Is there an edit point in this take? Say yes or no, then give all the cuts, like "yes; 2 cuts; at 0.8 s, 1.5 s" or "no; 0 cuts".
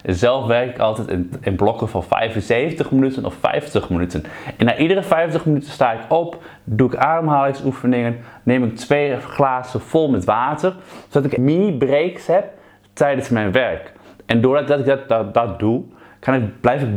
yes; 1 cut; at 11.4 s